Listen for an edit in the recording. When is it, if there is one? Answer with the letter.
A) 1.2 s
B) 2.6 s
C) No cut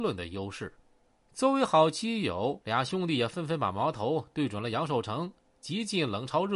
B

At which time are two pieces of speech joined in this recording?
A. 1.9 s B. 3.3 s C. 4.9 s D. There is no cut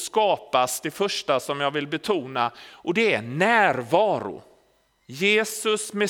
C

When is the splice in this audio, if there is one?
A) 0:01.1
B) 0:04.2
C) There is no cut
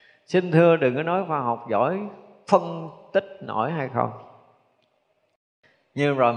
C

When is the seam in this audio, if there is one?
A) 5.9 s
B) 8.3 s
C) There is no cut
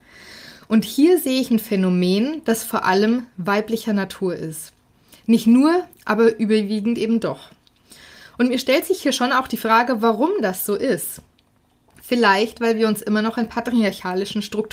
A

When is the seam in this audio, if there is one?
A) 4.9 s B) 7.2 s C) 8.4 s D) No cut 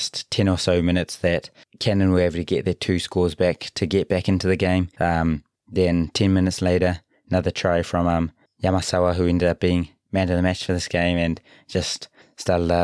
A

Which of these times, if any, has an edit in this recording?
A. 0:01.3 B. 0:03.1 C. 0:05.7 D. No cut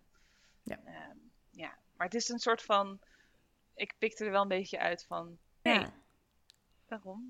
C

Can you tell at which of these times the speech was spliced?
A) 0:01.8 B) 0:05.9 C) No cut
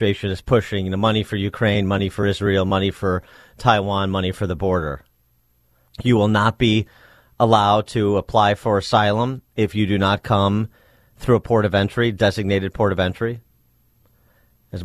B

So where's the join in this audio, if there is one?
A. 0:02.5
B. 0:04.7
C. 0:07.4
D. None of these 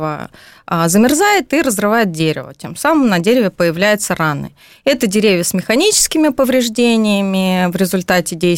D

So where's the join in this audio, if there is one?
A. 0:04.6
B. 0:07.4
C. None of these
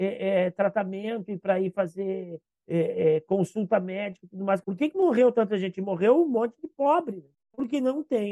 A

